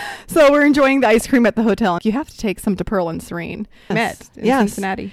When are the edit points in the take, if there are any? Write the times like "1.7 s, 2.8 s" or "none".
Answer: 2.0 s, 3.9 s